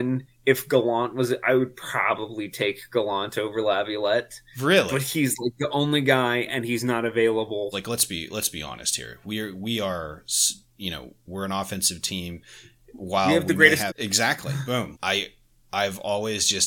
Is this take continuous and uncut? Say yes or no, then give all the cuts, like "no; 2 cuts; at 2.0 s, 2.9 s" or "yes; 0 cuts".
no; 3 cuts; at 7.7 s, 13.9 s, 14.9 s